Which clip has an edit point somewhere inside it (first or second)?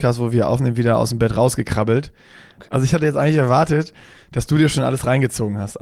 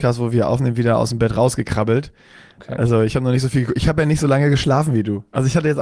first